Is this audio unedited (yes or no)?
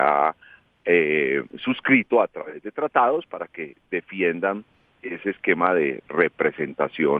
no